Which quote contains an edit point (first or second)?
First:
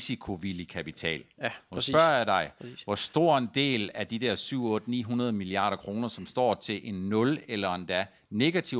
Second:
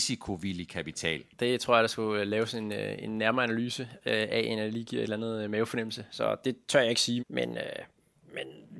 second